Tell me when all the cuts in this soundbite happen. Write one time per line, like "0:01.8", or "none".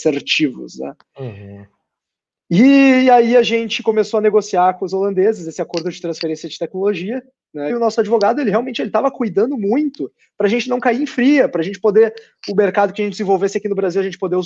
0:07.7